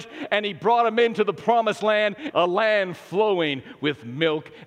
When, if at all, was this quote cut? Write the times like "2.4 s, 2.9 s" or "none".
2.3 s